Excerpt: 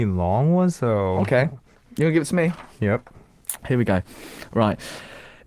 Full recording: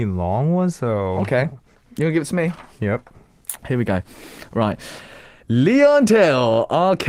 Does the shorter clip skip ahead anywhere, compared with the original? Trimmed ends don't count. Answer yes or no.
no